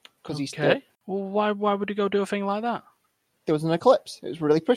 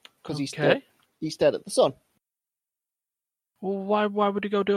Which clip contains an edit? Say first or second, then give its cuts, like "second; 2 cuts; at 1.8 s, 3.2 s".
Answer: first; 1 cut; at 0.9 s